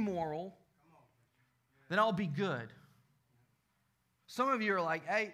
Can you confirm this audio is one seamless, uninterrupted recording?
no; 1 cut; at 4.2 s

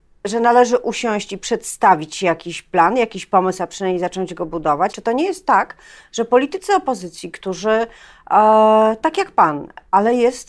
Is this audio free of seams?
no; 1 cut; at 4.9 s

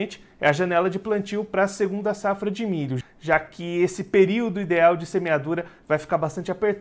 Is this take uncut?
no; 1 cut; at 3.0 s

